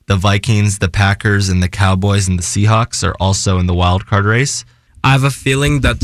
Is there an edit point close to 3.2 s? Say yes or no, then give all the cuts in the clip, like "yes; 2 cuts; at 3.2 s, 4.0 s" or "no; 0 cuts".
no; 1 cut; at 4.9 s